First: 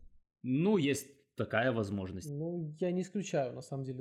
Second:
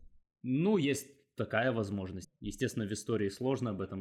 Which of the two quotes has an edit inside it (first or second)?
second